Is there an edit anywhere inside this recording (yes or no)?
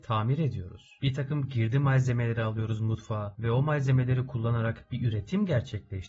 no